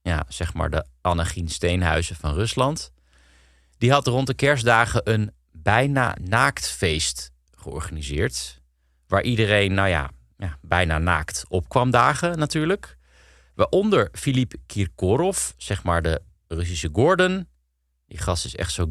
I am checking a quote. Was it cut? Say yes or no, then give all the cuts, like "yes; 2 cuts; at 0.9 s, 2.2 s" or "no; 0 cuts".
no; 0 cuts